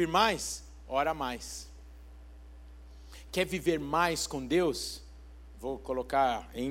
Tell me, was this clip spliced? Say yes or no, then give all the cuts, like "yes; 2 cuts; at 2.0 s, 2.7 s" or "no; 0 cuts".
yes; 1 cut; at 5.5 s